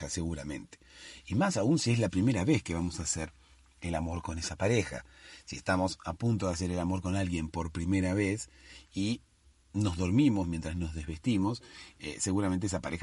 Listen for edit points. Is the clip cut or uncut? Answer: uncut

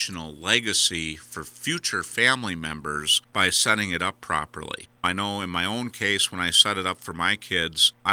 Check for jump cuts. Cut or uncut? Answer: uncut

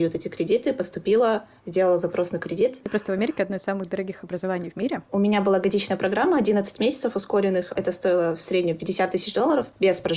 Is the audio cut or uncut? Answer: cut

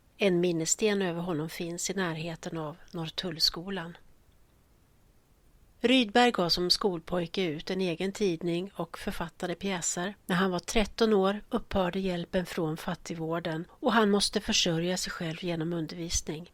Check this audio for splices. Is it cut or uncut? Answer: cut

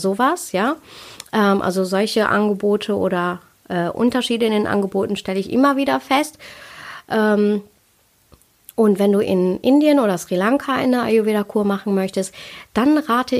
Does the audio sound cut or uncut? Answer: uncut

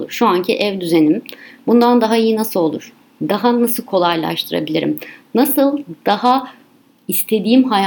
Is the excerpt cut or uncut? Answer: uncut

